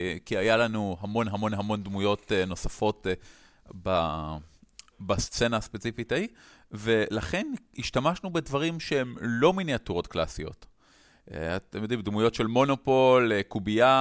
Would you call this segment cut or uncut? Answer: uncut